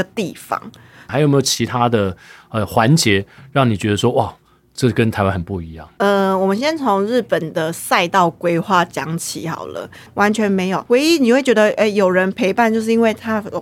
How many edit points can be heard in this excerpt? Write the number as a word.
two